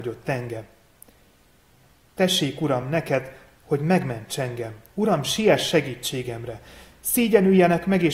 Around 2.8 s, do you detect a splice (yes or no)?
no